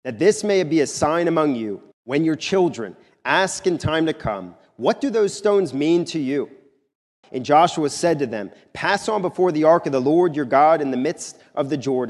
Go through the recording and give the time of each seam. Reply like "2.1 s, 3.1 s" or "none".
1.9 s, 7.2 s